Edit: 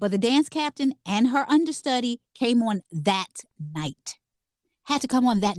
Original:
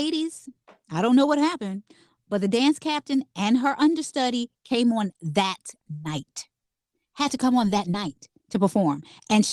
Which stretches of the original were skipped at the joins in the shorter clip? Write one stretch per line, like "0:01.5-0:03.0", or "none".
none